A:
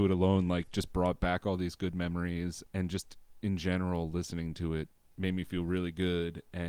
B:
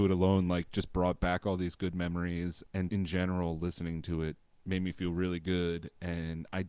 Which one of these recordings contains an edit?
B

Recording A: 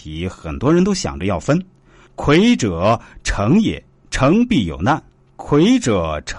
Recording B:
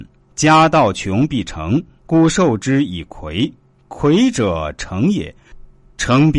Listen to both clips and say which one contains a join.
A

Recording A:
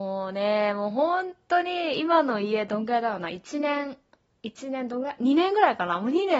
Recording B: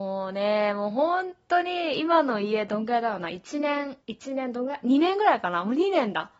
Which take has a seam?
B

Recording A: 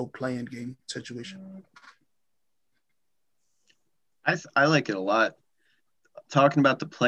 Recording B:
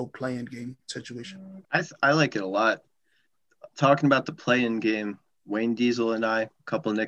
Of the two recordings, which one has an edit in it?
B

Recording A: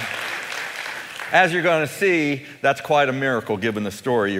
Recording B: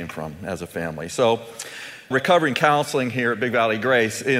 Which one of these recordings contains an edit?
B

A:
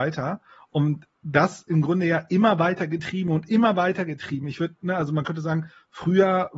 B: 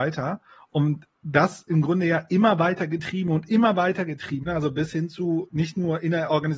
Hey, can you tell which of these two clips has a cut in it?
B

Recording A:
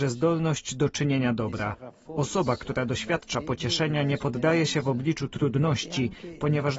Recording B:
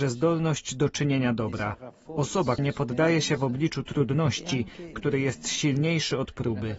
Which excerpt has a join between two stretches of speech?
B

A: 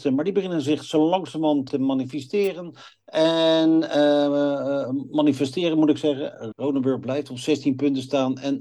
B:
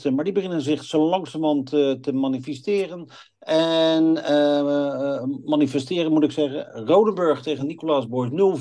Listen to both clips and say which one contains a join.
A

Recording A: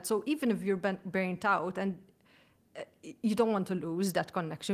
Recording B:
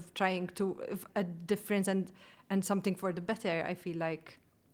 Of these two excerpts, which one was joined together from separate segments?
B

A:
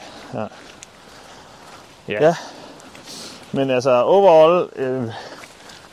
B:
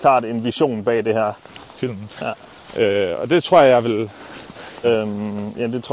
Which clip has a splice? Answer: B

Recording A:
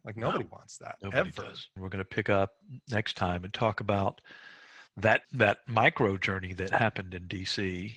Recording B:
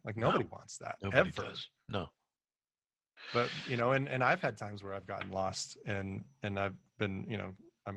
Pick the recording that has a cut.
A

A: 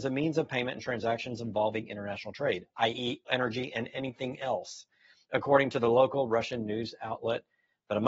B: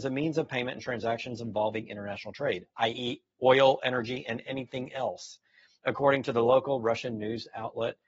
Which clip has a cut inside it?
A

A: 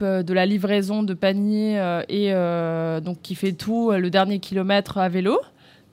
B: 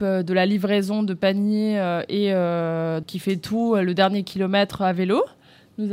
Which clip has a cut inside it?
B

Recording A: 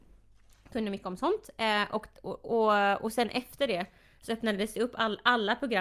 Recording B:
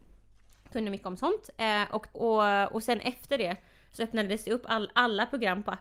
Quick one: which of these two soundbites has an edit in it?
B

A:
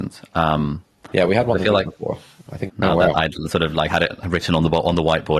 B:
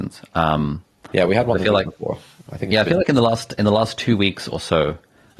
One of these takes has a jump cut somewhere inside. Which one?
A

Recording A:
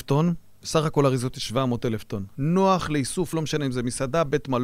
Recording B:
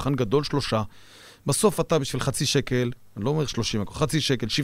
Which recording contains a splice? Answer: A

